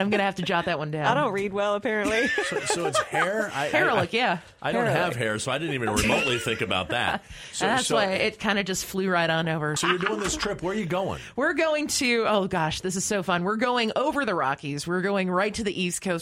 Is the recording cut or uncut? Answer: cut